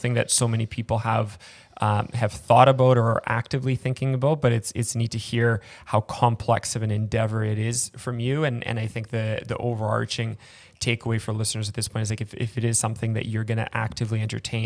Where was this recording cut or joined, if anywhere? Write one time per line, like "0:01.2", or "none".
none